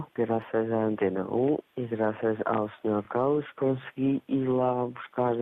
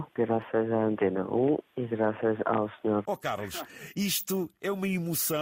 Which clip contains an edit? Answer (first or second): second